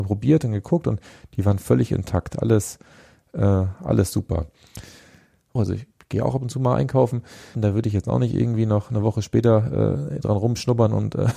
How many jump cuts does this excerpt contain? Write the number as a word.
two